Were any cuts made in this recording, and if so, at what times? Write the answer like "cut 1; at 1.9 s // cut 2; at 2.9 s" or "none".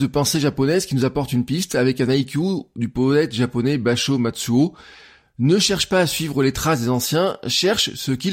none